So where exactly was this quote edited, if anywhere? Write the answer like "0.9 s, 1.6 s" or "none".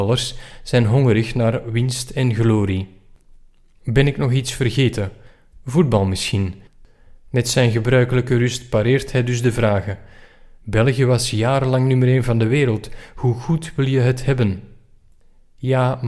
7.2 s